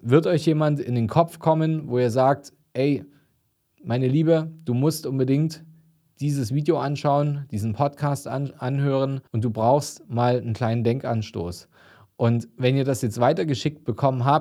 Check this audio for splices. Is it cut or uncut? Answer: cut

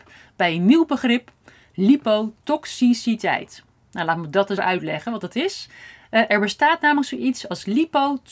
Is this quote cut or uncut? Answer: cut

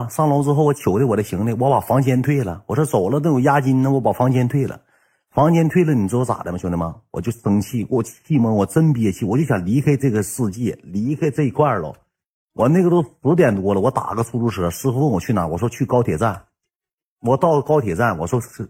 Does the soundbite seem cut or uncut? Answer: uncut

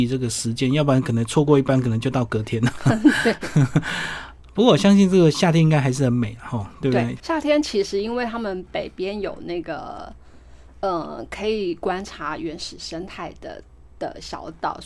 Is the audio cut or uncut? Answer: cut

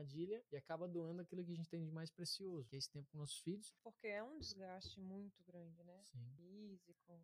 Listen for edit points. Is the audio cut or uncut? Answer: cut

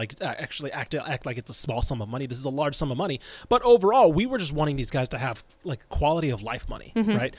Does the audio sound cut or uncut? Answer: uncut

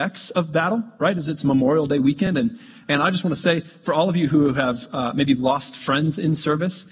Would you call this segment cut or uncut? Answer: uncut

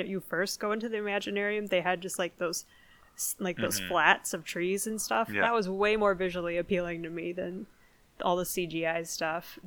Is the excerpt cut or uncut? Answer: uncut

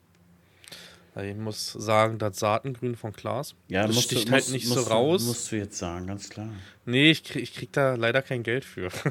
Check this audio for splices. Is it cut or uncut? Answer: cut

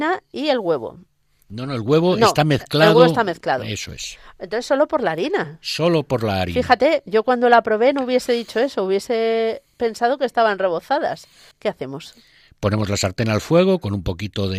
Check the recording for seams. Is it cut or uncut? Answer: cut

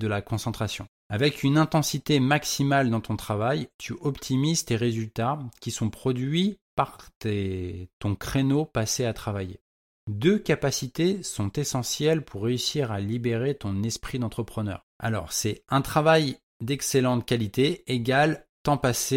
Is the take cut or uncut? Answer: cut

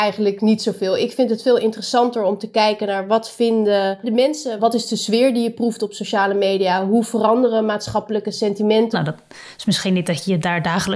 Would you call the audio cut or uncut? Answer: cut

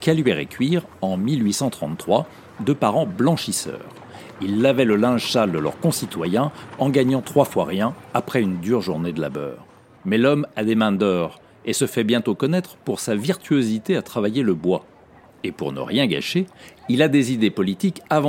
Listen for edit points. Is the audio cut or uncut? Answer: cut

